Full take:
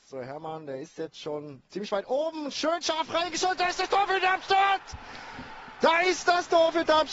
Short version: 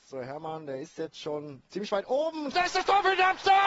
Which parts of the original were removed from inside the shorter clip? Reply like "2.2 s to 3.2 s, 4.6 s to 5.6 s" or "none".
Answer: 2.5 s to 3.6 s